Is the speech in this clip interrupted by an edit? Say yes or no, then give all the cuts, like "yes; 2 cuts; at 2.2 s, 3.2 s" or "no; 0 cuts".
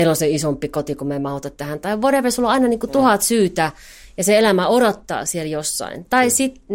no; 0 cuts